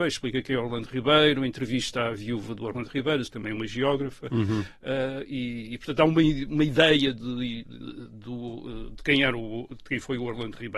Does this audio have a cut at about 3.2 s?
yes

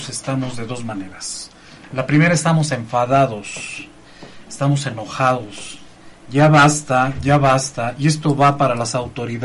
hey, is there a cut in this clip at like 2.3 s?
no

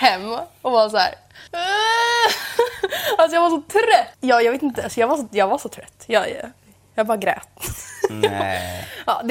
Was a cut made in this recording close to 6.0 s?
no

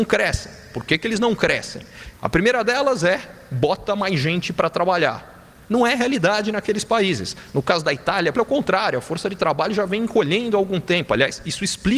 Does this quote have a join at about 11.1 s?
no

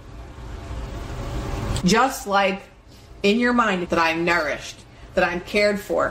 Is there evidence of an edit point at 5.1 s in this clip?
no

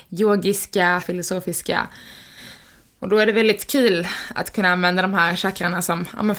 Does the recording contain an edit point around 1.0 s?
yes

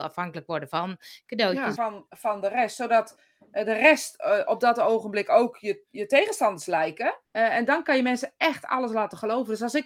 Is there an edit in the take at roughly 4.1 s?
no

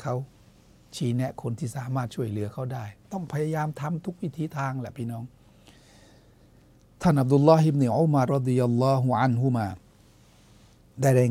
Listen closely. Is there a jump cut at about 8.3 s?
yes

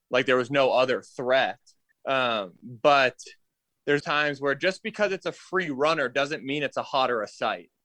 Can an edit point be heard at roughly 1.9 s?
yes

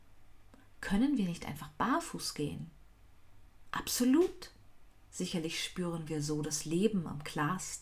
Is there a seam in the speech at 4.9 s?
yes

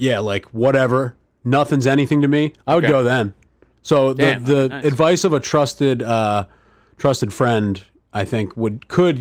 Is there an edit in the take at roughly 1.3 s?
no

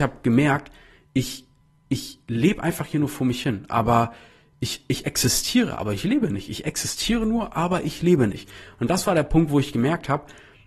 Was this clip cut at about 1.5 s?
no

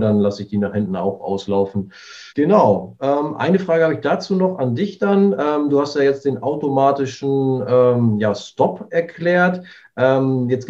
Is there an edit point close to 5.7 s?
no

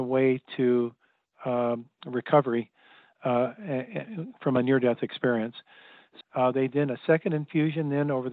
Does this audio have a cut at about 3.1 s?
no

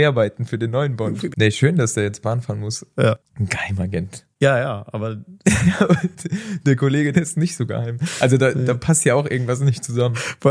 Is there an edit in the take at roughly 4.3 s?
yes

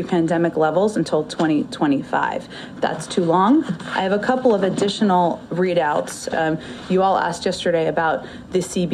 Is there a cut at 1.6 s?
no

